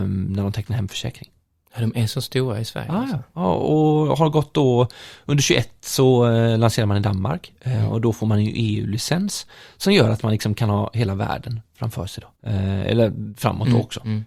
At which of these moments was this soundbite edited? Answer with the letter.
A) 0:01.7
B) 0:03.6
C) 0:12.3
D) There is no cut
C